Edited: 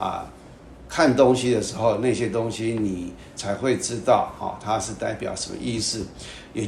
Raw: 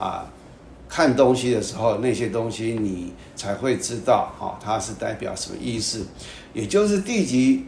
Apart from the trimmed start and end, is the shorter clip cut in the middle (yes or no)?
no